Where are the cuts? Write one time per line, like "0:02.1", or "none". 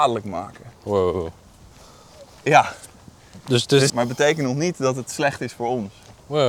0:03.9